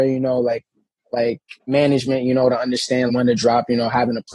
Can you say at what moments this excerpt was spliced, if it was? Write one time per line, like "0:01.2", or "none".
0:01.6
0:03.1